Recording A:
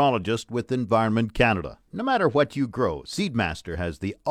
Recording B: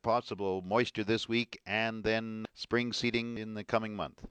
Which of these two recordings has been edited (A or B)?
A